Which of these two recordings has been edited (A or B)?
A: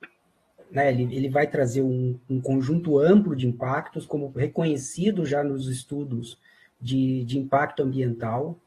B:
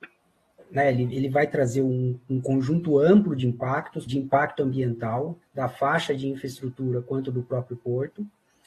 B